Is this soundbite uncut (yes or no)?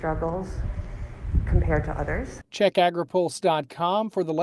yes